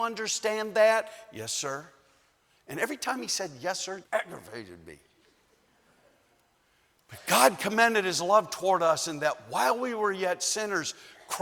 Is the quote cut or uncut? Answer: cut